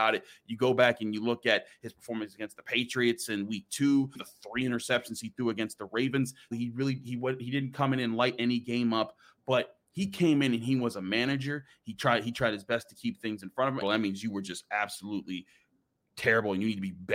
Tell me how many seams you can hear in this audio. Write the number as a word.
three